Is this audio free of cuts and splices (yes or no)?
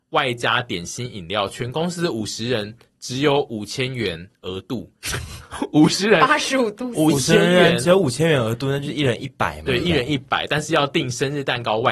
yes